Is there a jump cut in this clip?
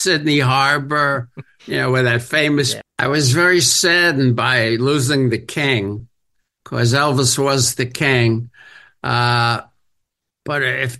yes; 1 cut; at 2.8 s

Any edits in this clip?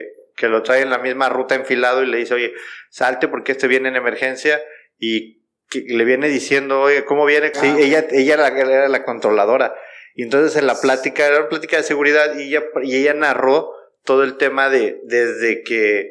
yes; 1 cut; at 7.5 s

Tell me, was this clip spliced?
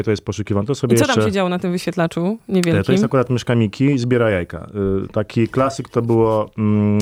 no; 0 cuts

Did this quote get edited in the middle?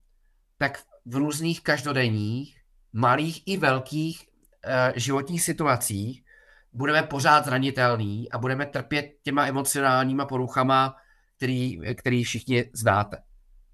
no; 0 cuts

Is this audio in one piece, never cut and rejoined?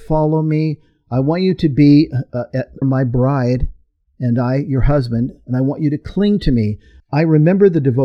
no; 2 cuts; at 2.8 s, 7.0 s

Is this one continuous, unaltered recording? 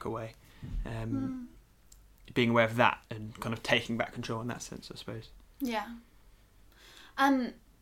yes; 0 cuts

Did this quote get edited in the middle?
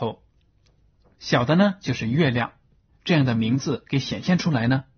yes; 1 cut; at 2.9 s

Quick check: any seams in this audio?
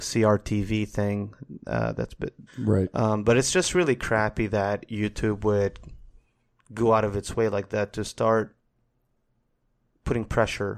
yes; 1 cut; at 2.5 s

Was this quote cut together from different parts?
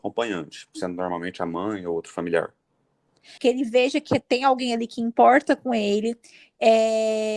yes; 1 cut; at 3.4 s

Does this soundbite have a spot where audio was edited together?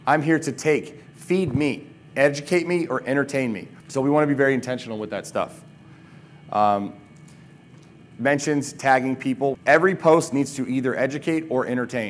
yes; 2 cuts; at 3.8 s, 9.5 s

